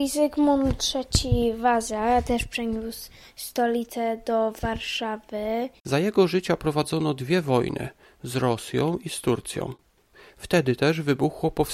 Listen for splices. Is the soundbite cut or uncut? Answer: cut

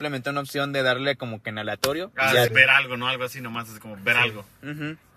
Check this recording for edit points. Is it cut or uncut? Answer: cut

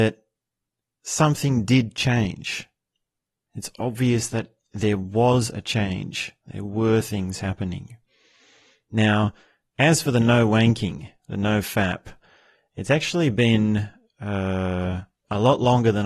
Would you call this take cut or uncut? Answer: uncut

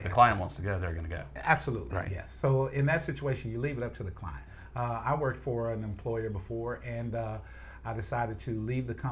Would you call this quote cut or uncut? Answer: uncut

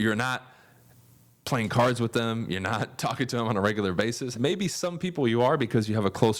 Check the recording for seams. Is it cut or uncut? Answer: cut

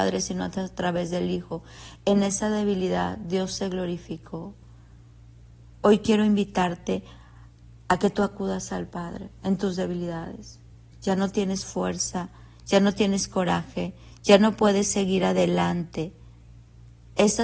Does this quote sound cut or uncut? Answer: uncut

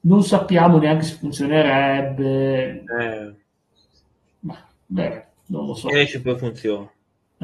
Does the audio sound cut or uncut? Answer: uncut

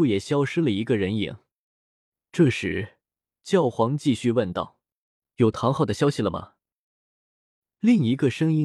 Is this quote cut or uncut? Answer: uncut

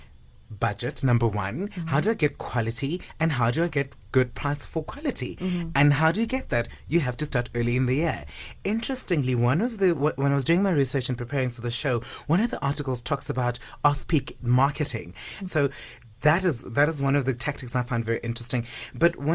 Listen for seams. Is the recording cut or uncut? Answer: cut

